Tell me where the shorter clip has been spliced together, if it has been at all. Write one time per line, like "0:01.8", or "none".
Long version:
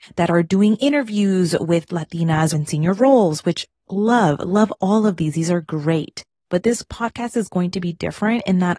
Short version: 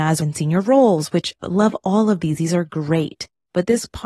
0:01.4